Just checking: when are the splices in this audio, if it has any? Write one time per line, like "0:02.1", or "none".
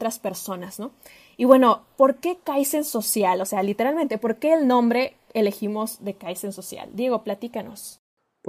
none